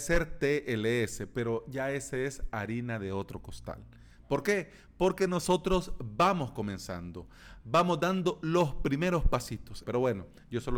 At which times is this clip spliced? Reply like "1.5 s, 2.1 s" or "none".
7.6 s, 9.8 s